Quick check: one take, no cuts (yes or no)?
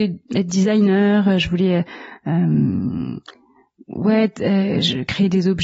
yes